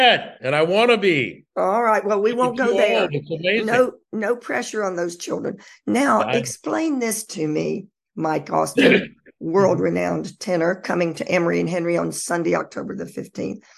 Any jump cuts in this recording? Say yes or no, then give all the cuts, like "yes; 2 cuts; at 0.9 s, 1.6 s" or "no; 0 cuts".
no; 0 cuts